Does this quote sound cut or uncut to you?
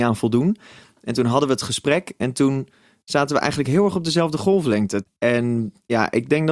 cut